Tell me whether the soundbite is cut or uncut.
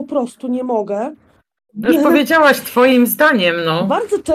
cut